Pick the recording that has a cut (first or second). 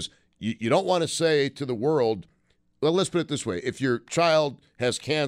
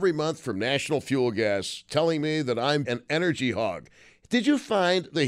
second